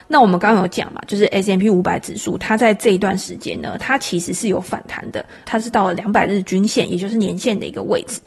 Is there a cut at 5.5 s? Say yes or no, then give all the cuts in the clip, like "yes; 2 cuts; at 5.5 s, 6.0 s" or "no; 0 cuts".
yes; 1 cut; at 5.5 s